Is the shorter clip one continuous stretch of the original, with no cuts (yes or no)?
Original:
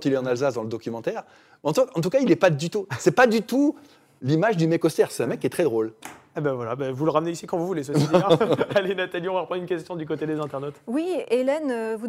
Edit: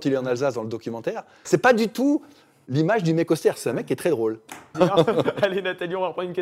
no